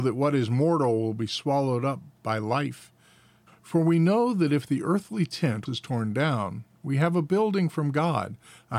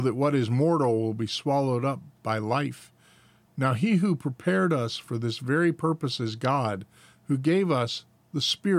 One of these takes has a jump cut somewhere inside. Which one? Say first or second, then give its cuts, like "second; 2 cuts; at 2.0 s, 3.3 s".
first; 2 cuts; at 3.5 s, 5.7 s